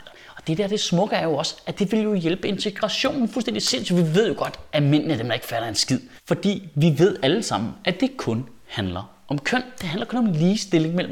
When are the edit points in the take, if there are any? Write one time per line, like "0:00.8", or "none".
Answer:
0:06.2